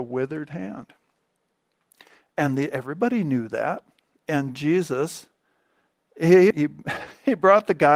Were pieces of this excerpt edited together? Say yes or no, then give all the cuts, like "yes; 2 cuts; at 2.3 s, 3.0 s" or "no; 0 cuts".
yes; 1 cut; at 6.5 s